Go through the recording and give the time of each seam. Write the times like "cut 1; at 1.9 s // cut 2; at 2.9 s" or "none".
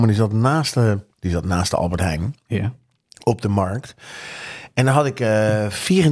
cut 1; at 1.1 s